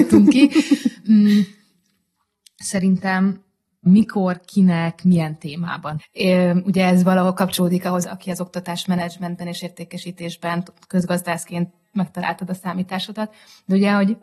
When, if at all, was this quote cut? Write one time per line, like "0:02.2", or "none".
0:06.0
0:08.0

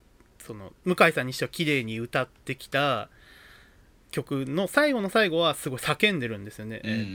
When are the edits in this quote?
none

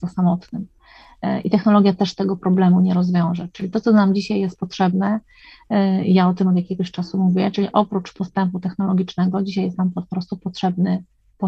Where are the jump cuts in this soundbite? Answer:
none

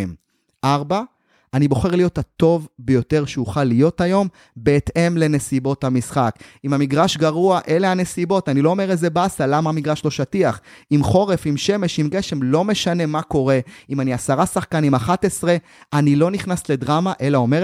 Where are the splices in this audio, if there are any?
none

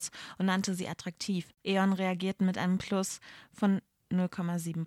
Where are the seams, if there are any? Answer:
0:01.6

